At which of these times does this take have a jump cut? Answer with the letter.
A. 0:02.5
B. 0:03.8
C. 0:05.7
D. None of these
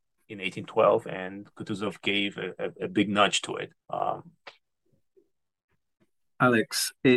B